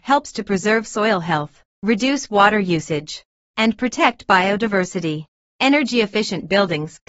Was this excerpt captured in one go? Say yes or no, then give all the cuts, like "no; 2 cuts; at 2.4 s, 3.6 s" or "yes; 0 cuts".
no; 1 cut; at 5.4 s